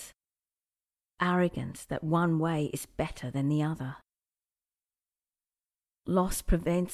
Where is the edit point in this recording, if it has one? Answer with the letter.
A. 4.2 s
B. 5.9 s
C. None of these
B